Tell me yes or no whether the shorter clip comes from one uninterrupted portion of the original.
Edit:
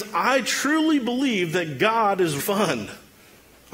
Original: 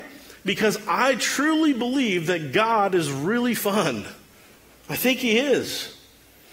no